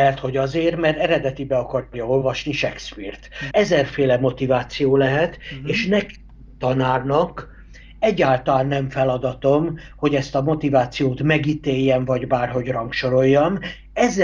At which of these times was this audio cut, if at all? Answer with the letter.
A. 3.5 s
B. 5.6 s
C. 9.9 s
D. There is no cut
A